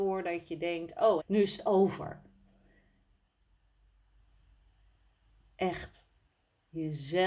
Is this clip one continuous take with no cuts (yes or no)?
no